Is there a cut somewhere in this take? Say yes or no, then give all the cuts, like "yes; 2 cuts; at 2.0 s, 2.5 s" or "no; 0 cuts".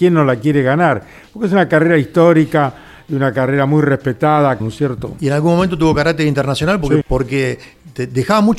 yes; 2 cuts; at 4.6 s, 7.0 s